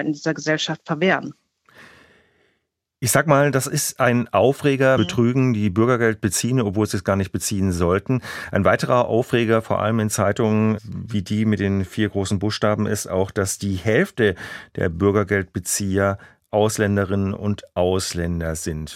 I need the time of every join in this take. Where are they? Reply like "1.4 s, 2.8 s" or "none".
5.0 s